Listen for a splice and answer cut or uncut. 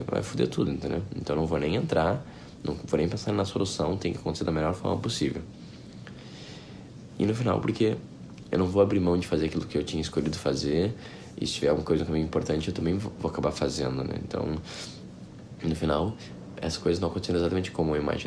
uncut